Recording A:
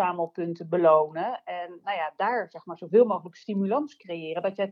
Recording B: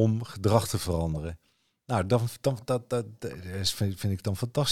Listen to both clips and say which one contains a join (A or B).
A